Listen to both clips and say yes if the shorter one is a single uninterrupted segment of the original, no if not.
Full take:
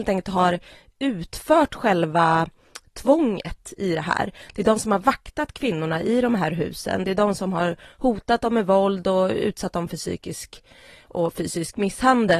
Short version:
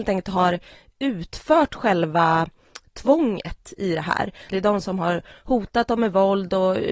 no